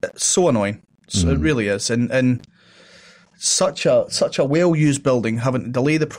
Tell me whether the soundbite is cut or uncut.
uncut